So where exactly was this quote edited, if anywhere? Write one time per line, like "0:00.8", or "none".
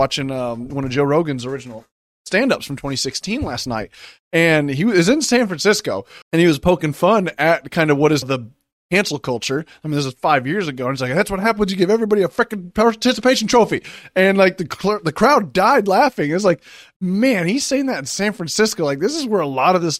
0:06.2
0:08.2